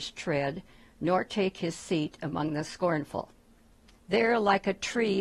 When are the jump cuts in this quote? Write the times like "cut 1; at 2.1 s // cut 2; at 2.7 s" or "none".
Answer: cut 1; at 3.9 s